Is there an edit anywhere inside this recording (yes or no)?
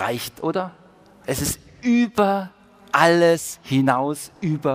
yes